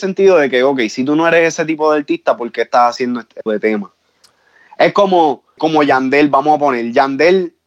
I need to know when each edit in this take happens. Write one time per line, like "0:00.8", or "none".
0:03.5
0:05.6